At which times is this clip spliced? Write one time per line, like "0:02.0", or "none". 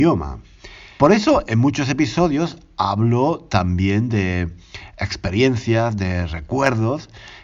0:01.0